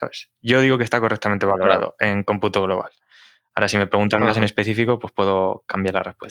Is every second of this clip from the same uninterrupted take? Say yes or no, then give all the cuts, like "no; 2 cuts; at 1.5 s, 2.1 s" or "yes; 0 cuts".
yes; 0 cuts